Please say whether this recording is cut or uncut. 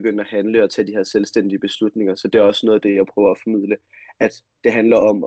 uncut